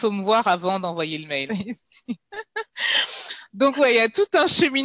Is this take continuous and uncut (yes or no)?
no